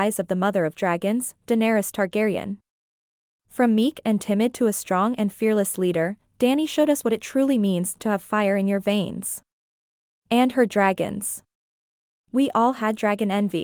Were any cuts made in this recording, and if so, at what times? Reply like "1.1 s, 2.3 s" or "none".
none